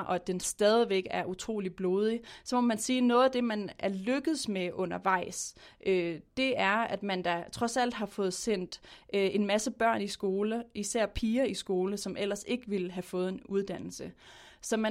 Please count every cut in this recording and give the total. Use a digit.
0